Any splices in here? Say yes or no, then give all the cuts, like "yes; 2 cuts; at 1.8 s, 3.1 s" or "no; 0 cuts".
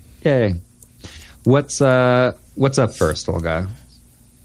yes; 1 cut; at 2.5 s